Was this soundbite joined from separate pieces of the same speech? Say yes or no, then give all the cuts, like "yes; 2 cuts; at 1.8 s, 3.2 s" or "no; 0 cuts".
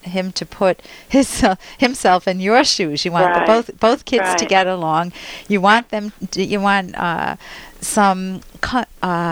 no; 0 cuts